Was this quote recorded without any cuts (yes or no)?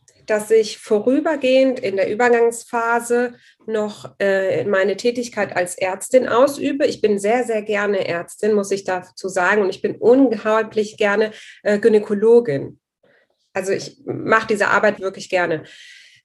no